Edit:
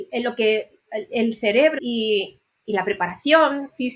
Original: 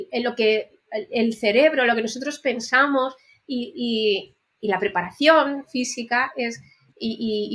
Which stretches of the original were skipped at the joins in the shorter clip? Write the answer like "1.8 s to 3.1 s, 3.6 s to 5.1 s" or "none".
1.8 s to 3.7 s